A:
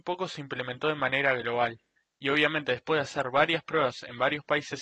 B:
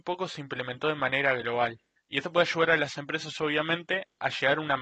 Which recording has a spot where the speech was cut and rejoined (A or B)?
B